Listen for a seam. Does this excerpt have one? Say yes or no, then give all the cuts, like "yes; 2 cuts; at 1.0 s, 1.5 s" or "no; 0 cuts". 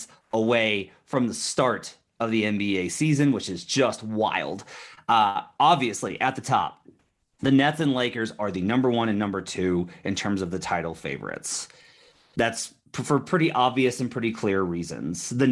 no; 0 cuts